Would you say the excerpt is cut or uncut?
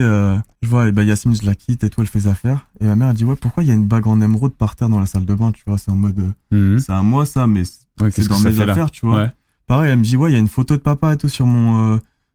uncut